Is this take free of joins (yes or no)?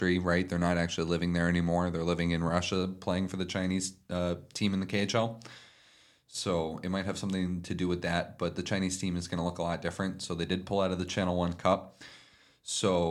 yes